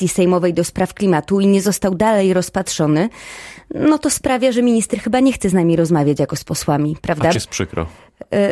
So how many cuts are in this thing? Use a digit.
1